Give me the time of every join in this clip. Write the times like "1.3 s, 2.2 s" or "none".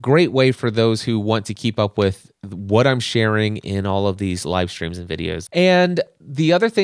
5.5 s